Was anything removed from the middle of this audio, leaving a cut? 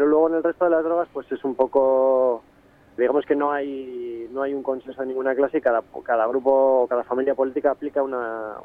yes; 1 cut; at 3.0 s

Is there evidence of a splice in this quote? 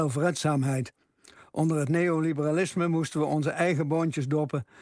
no; 0 cuts

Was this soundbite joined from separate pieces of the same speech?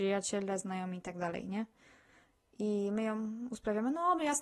no; 0 cuts

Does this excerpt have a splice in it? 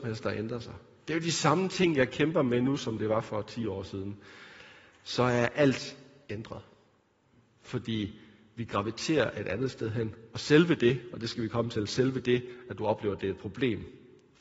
no; 0 cuts

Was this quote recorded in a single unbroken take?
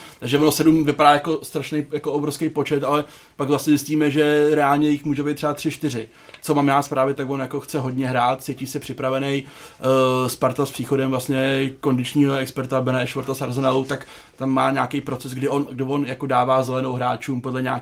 no; 2 cuts; at 6.4 s, 15.7 s

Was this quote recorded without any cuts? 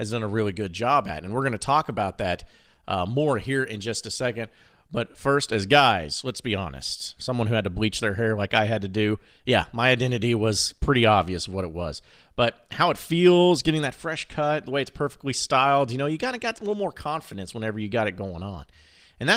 no; 1 cut; at 7.2 s

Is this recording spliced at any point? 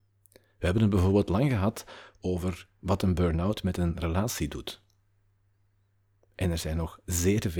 no; 0 cuts

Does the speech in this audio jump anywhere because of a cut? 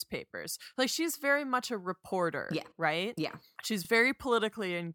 no; 0 cuts

